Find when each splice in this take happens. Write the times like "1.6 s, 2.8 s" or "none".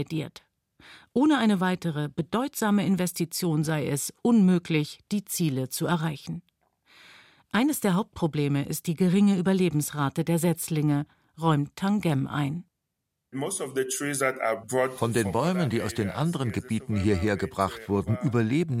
none